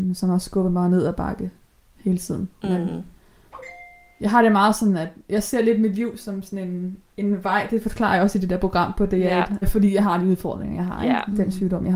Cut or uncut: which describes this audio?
cut